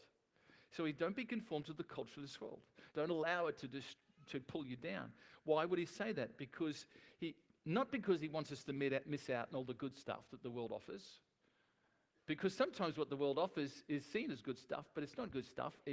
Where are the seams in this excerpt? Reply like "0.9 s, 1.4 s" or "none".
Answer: 2.9 s